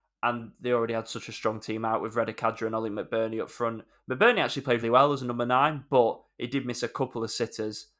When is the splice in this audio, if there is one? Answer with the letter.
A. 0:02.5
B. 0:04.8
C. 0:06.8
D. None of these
B